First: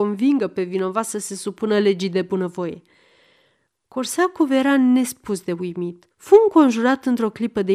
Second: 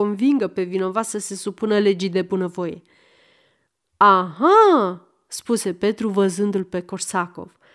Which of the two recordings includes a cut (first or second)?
first